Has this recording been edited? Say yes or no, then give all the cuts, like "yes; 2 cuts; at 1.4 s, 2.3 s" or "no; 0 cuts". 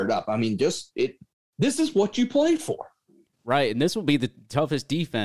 no; 0 cuts